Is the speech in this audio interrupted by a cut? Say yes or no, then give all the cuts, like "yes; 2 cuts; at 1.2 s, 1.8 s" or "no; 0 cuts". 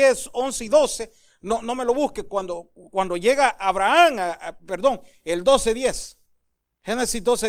no; 0 cuts